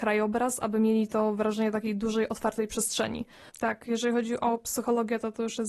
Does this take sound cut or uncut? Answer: cut